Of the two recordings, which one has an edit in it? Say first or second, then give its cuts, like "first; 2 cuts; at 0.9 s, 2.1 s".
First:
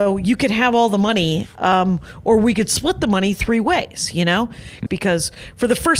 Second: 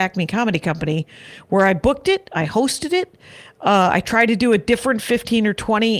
first; 1 cut; at 4.9 s